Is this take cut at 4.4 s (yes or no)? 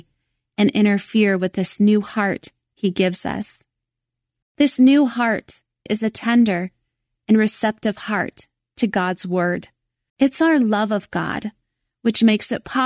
no